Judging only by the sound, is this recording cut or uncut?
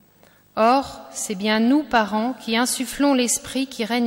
uncut